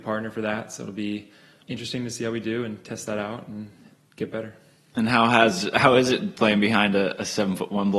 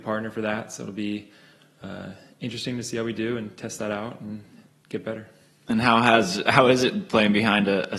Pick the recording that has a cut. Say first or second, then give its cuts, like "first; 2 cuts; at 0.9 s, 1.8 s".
first; 1 cut; at 1.6 s